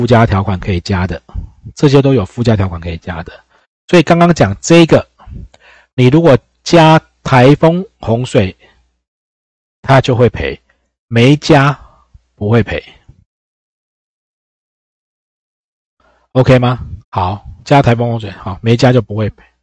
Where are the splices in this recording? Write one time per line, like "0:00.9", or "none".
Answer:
0:17.0